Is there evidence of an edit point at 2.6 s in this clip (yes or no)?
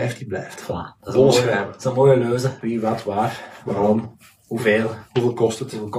yes